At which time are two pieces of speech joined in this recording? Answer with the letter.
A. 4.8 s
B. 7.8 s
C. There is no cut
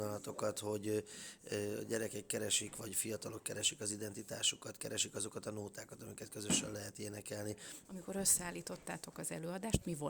B